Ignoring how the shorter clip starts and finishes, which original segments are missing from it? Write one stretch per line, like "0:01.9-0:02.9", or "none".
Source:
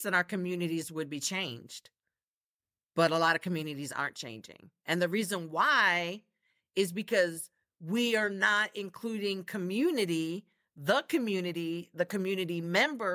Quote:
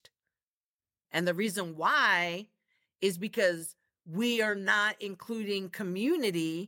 0:02.9-0:04.8